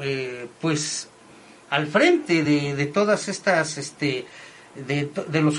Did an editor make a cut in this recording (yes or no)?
no